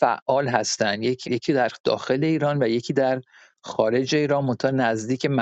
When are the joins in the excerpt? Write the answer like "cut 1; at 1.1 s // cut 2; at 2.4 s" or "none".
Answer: cut 1; at 1.2 s